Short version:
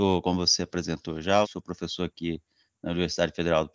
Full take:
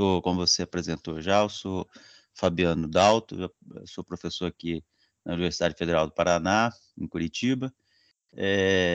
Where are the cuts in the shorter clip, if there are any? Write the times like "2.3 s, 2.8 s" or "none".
1.4 s